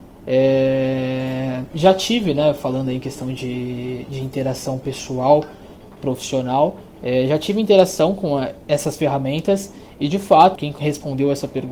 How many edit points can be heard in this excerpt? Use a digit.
1